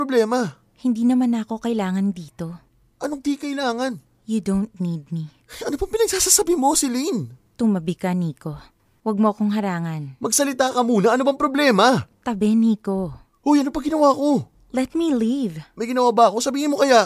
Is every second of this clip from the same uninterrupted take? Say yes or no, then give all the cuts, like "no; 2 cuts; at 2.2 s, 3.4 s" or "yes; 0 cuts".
yes; 0 cuts